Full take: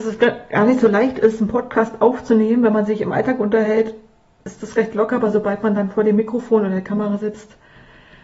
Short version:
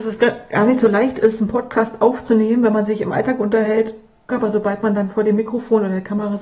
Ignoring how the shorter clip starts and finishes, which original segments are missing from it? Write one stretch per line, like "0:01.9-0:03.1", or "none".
0:04.3-0:05.1